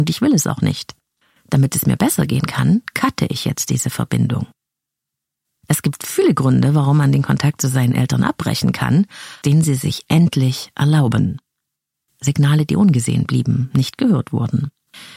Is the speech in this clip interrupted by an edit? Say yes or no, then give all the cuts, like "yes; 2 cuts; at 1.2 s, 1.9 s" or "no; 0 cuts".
yes; 2 cuts; at 9.4 s, 12.0 s